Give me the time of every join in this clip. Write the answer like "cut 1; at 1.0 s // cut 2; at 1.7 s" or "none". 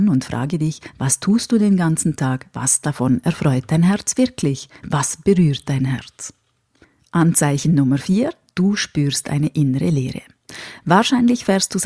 none